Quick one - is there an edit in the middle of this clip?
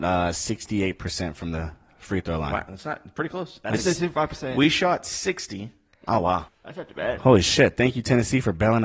yes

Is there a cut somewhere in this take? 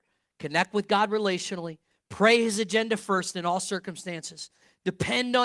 yes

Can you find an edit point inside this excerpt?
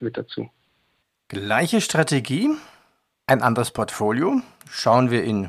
no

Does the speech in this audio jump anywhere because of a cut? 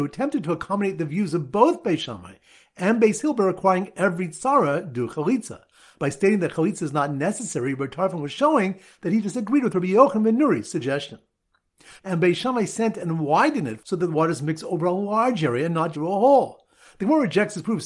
yes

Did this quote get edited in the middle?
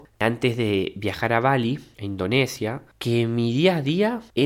no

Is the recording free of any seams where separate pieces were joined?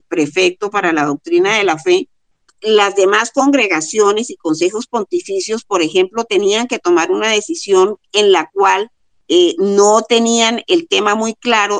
yes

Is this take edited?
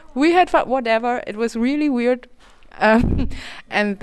no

